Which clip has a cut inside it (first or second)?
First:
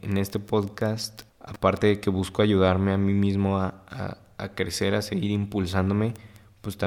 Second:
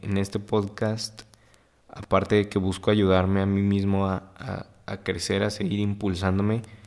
first